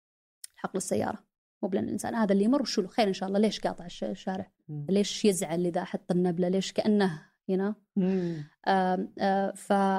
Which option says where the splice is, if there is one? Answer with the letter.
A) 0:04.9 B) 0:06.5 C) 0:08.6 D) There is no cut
A